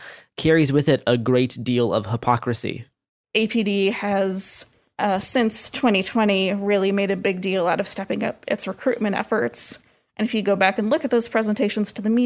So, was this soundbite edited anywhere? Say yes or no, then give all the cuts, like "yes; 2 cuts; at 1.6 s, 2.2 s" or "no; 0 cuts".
no; 0 cuts